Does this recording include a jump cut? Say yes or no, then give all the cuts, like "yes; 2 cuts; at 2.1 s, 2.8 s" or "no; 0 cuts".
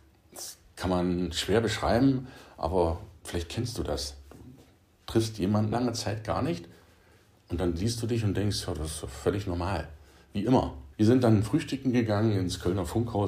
yes; 2 cuts; at 5.7 s, 10.9 s